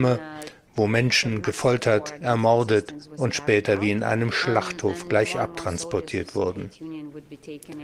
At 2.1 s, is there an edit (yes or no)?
no